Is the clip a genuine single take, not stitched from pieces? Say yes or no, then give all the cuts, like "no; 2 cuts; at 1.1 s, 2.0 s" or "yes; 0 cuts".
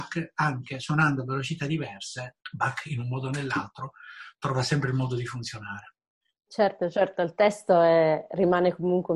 no; 1 cut; at 2.4 s